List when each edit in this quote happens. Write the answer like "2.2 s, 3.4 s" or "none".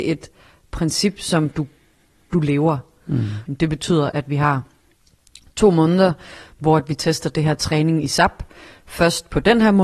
3.5 s